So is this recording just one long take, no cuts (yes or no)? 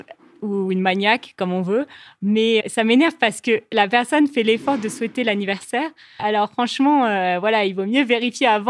no